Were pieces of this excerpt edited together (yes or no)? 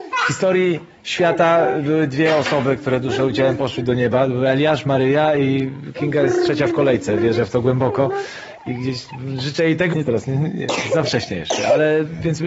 yes